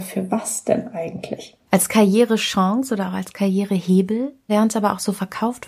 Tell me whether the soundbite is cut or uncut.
cut